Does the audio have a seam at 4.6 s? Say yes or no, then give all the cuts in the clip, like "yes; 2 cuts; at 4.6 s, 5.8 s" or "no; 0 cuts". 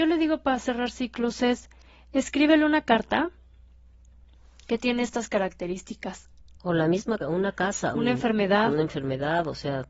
no; 2 cuts; at 6.6 s, 7.9 s